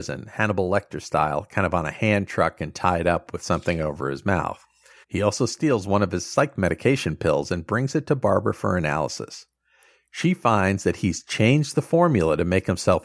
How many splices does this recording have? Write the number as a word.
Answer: one